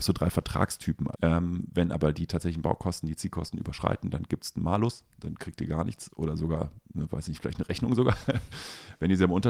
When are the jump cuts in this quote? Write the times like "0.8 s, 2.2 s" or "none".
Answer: 1.1 s